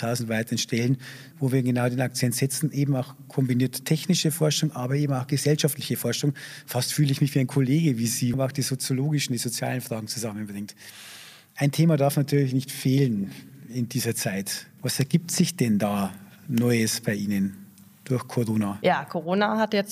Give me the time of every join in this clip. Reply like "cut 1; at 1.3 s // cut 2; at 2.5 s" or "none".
cut 1; at 1.3 s // cut 2; at 8.3 s // cut 3; at 14.8 s